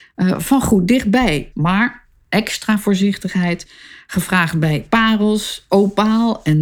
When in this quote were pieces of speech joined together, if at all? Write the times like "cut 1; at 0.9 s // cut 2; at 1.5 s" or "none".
cut 1; at 1.5 s